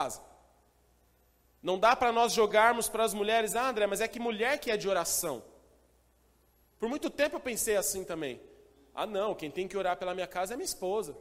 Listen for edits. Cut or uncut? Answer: uncut